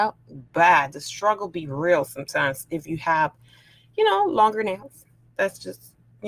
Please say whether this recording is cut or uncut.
uncut